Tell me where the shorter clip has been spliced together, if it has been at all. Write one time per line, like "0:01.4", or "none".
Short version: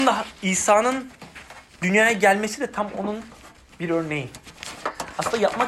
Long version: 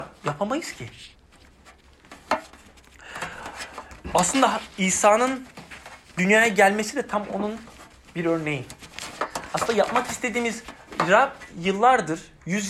none

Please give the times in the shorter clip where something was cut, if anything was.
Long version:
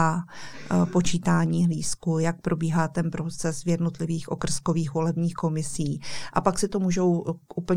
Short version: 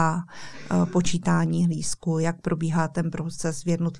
none

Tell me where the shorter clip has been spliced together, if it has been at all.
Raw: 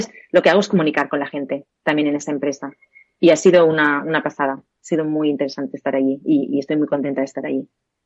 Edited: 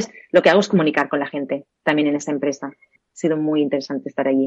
0:03.0

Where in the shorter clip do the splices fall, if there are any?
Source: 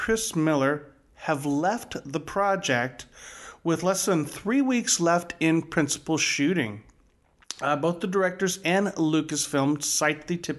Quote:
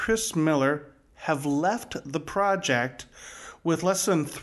none

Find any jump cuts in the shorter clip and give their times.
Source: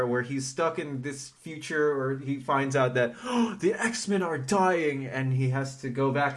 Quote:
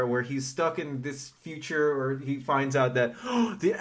none

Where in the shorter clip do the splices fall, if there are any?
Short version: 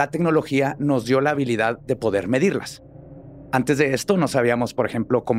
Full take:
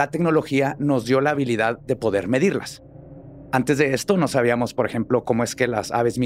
none

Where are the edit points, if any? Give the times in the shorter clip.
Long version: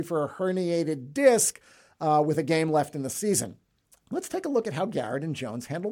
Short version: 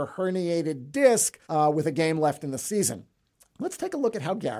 0:01.4

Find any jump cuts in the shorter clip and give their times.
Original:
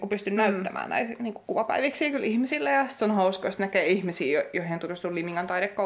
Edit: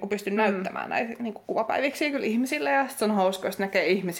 none

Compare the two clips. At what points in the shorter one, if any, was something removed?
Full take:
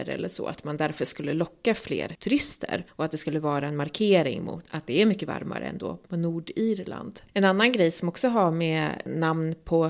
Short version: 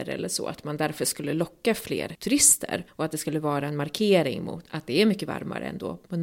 none

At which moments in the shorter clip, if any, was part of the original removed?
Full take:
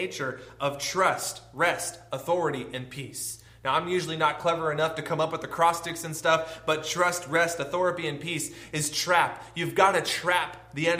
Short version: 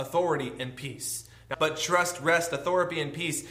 0:01.5

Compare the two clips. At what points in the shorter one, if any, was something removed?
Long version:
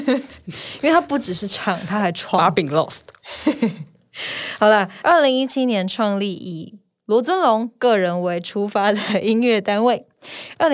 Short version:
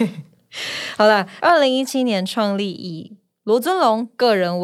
none

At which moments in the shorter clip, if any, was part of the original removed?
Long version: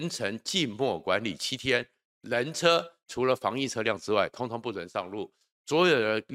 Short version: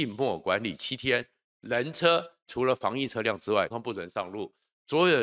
0:03.7

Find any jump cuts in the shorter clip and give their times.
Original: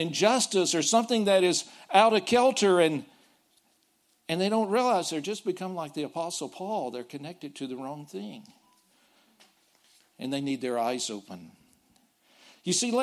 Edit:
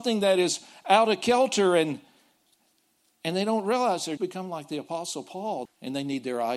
0:04.2
0:05.7

